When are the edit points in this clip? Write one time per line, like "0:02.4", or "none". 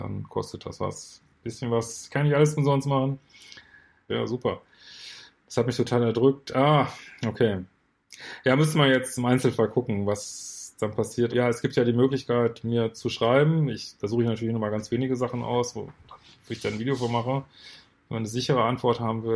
0:04.1
0:11.3